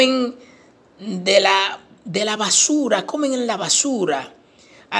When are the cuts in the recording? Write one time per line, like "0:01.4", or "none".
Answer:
none